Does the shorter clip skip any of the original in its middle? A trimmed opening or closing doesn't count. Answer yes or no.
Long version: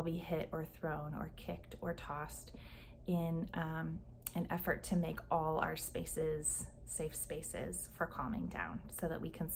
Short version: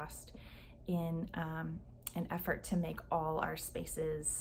no